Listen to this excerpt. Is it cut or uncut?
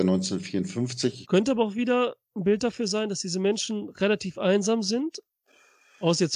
cut